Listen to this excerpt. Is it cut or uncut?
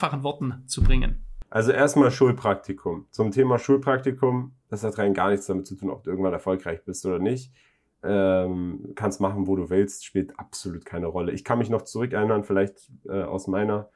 uncut